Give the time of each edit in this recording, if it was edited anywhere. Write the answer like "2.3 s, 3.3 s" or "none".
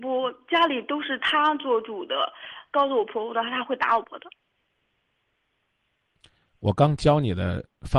4.0 s